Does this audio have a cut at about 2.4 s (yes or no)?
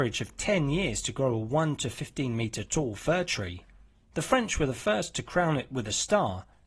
no